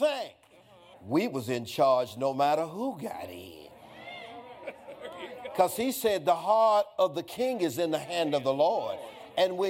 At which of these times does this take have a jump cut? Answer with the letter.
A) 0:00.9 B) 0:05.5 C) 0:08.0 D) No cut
A